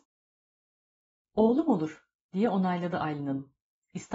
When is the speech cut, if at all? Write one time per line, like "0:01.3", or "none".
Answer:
none